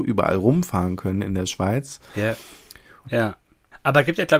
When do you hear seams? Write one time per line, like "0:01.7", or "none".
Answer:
0:03.0